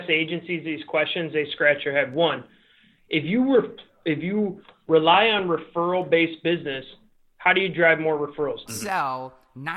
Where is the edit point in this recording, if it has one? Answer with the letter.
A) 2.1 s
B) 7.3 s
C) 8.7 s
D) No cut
C